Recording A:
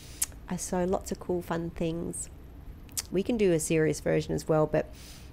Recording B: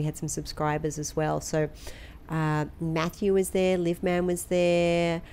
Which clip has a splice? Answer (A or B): A